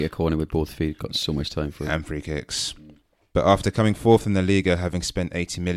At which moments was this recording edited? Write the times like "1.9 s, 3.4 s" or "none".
3.3 s